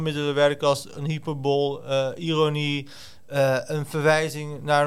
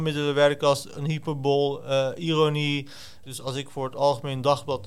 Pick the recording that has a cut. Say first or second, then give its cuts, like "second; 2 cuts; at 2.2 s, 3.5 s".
second; 1 cut; at 3.2 s